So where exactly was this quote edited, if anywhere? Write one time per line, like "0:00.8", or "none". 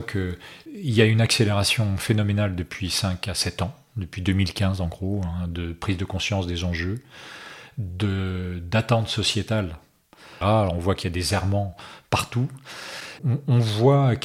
0:10.4
0:13.2